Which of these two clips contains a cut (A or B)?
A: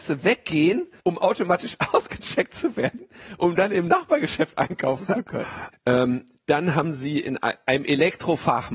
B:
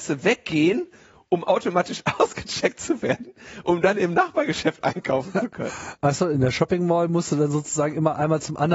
A